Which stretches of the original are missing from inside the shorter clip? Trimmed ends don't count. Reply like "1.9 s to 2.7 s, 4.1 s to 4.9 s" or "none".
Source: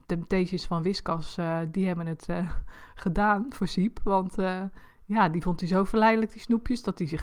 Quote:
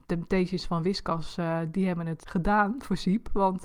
2.2 s to 2.9 s